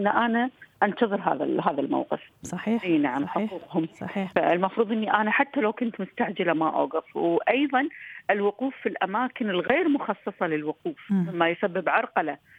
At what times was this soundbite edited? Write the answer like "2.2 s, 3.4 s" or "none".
2.4 s

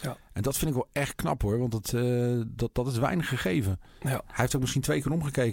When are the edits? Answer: none

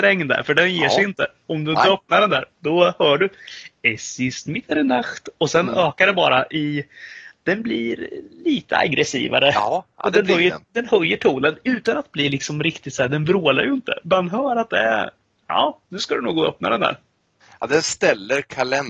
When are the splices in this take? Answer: 14.0 s

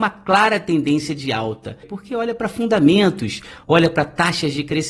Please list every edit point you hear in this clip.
1.8 s, 3.6 s

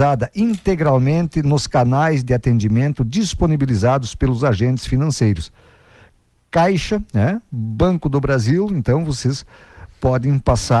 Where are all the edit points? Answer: none

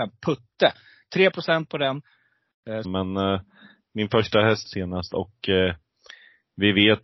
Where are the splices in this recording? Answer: 2.8 s, 4.7 s

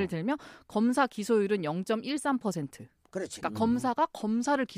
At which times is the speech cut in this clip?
3.4 s

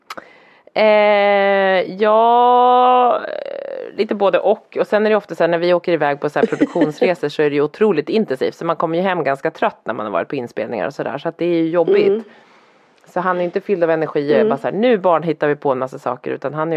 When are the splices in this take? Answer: none

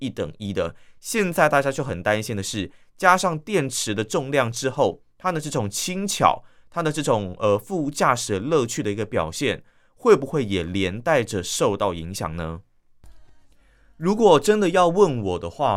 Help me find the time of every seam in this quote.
none

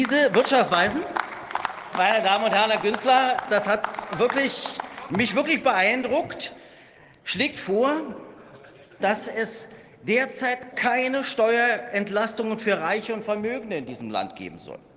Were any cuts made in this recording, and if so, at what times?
9.0 s, 10.7 s

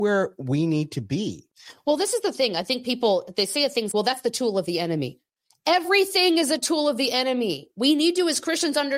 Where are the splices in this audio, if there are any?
3.9 s

